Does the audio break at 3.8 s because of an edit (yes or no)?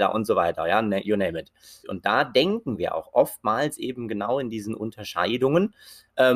no